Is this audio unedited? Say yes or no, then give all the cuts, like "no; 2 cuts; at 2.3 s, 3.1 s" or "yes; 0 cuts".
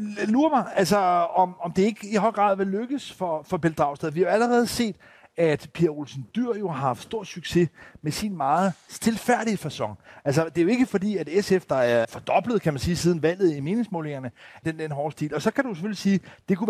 no; 2 cuts; at 12.0 s, 14.6 s